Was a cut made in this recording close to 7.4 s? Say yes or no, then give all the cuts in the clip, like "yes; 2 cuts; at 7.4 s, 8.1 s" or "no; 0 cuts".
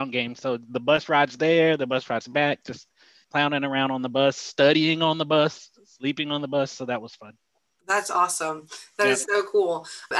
no; 0 cuts